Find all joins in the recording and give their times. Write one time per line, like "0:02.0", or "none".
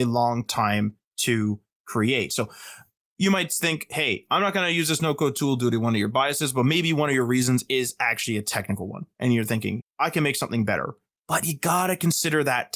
0:09.8

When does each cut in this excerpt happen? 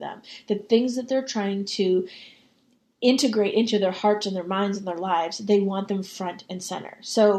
none

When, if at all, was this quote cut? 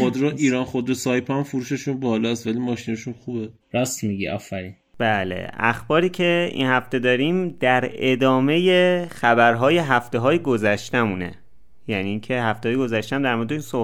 0:03.6

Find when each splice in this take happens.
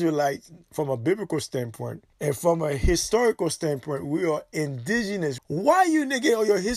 0:02.1
0:05.4

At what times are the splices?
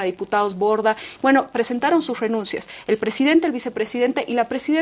0:01.2

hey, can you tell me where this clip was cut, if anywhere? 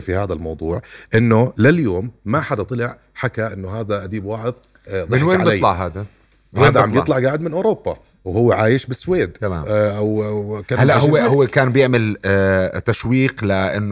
none

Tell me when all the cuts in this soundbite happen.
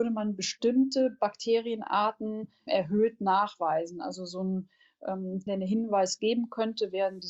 0:02.7
0:05.5

